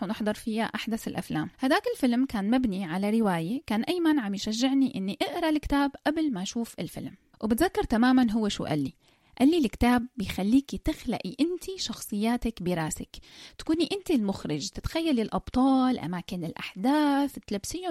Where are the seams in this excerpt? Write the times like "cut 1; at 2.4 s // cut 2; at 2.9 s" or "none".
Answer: cut 1; at 1.5 s